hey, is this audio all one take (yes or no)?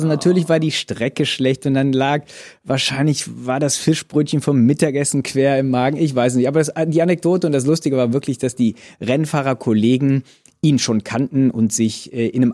yes